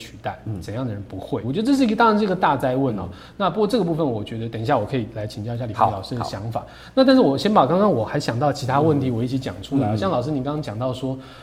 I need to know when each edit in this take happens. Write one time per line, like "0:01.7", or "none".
0:01.4